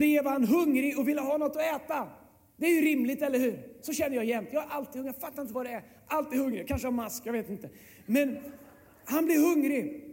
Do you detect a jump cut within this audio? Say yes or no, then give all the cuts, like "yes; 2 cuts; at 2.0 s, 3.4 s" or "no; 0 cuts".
no; 0 cuts